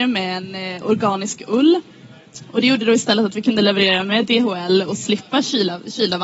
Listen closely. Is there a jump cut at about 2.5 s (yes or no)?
no